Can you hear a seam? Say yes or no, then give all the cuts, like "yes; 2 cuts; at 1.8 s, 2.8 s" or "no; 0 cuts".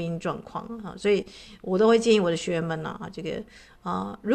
no; 0 cuts